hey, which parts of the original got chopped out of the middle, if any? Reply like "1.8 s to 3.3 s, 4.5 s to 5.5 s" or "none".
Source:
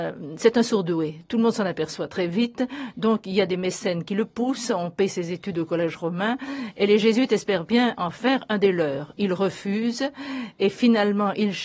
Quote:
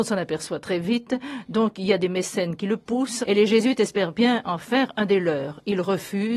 4.7 s to 6.7 s